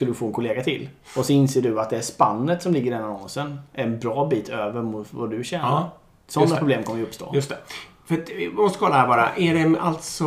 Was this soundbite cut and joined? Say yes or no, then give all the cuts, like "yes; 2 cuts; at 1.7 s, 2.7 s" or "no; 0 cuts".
no; 0 cuts